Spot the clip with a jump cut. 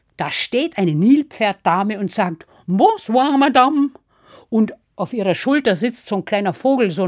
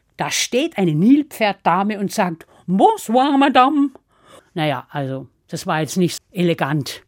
second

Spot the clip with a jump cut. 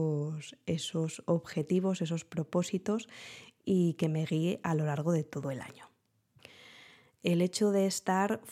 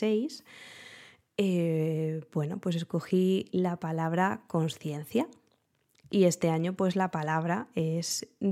first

